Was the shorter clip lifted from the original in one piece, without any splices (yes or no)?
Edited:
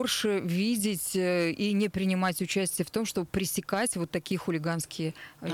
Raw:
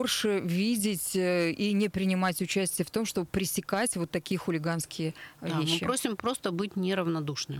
yes